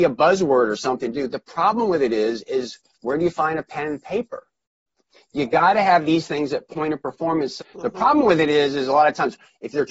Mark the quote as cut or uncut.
cut